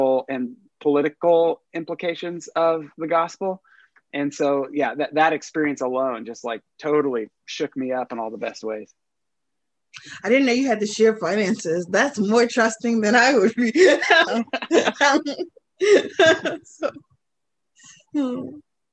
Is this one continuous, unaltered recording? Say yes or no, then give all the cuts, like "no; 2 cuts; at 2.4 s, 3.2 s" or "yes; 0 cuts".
no; 1 cut; at 14.3 s